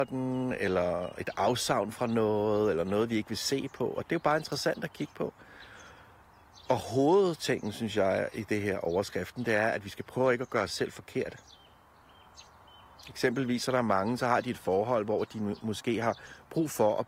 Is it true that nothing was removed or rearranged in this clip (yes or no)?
yes